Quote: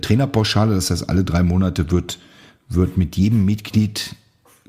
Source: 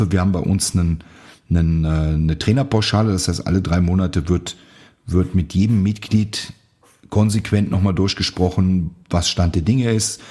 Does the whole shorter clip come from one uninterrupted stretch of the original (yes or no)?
yes